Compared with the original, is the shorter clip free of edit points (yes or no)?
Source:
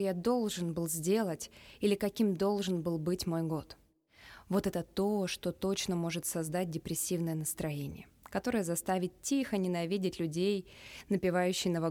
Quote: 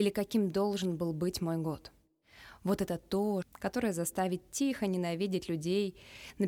no